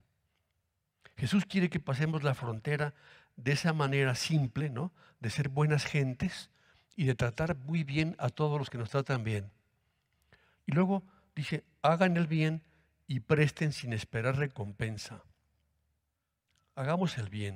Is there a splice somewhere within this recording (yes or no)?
yes